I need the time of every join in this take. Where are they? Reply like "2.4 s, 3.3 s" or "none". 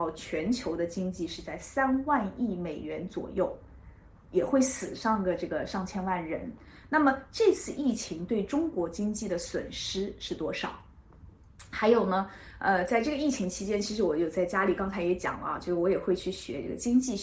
none

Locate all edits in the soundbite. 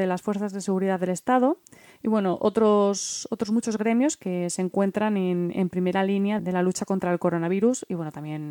6.4 s

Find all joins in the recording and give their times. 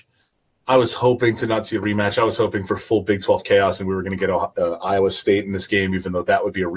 none

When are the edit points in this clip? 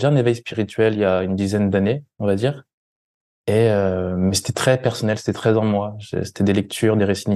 none

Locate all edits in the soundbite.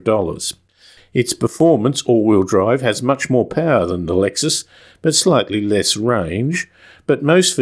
1.0 s

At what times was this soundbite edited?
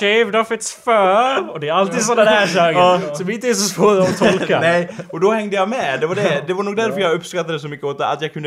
none

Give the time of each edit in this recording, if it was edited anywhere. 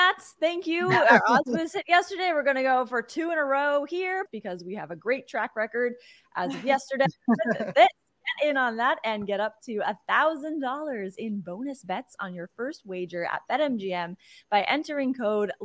4.3 s

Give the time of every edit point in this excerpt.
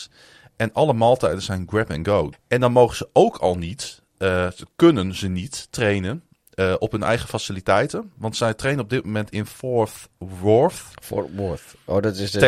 2.3 s

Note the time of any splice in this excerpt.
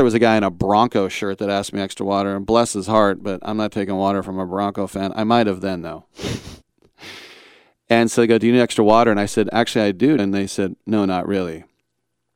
6.6 s, 10.2 s

